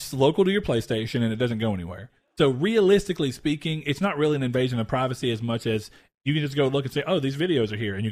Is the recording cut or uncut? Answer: uncut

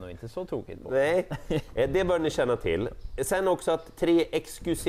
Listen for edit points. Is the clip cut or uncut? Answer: uncut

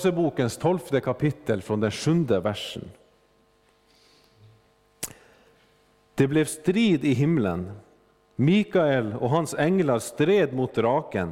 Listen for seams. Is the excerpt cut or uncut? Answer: uncut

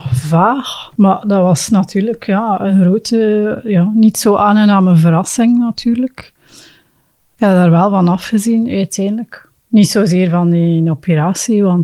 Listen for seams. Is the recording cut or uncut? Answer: uncut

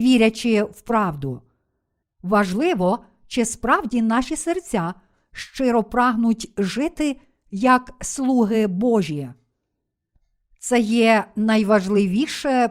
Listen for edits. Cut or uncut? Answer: cut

